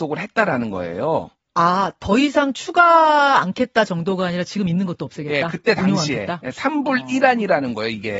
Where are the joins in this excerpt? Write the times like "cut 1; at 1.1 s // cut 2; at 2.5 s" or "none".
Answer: none